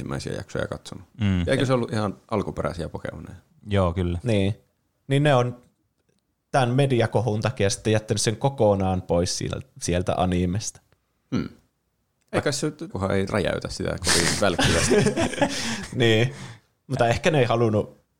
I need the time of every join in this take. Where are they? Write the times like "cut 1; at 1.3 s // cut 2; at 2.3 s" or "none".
cut 1; at 12.9 s